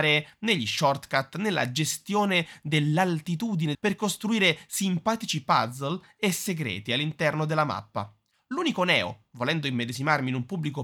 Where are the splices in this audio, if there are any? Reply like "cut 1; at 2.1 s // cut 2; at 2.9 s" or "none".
cut 1; at 3.7 s